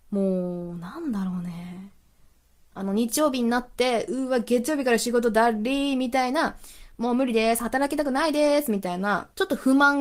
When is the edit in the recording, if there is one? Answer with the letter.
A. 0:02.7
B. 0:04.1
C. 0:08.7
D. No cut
A